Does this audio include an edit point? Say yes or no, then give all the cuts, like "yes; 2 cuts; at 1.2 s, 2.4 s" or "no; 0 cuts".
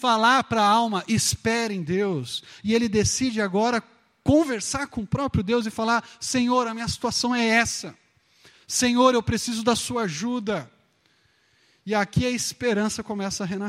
no; 0 cuts